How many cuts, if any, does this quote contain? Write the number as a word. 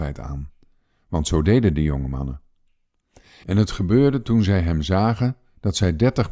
zero